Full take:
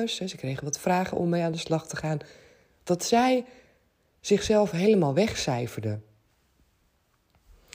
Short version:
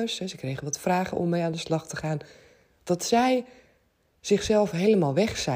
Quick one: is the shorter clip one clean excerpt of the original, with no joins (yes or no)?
yes